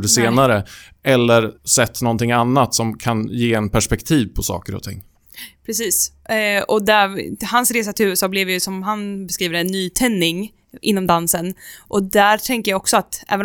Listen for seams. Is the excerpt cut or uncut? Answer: cut